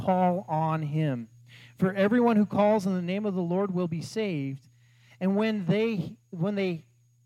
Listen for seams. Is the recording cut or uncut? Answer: uncut